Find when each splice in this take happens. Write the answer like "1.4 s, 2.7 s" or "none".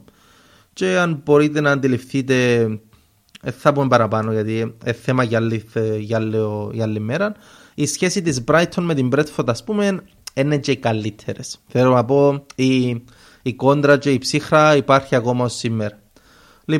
none